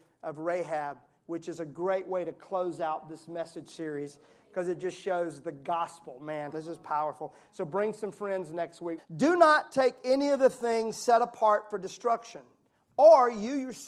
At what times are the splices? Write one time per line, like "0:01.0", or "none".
0:06.5
0:09.0

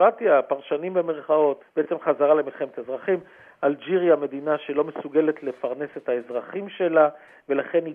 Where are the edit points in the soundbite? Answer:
0:01.6

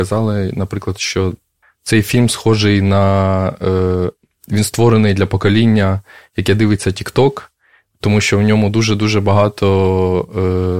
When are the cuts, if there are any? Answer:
0:01.6

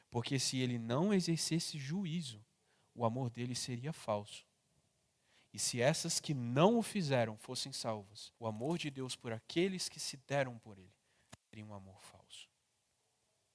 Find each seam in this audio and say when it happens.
0:05.4
0:08.3

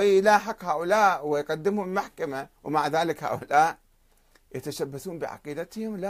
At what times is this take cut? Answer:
0:02.6

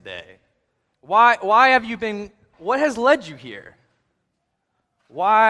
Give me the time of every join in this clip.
0:00.9
0:02.5

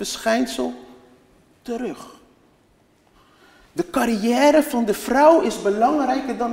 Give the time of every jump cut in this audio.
none

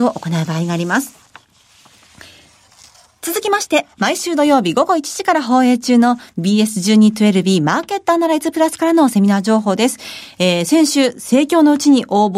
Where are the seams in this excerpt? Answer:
none

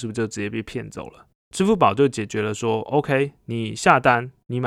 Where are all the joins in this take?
0:01.3

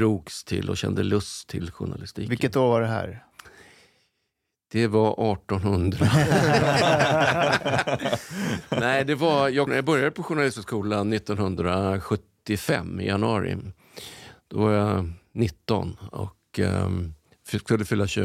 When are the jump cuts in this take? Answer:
0:09.7

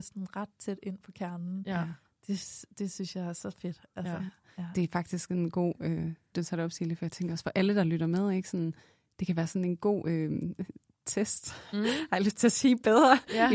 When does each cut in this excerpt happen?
0:06.3

